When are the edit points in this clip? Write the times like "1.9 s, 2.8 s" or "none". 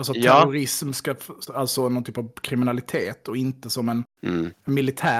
1.5 s